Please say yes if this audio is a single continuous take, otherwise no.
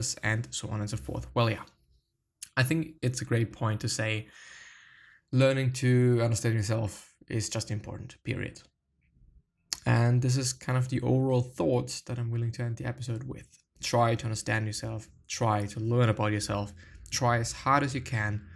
yes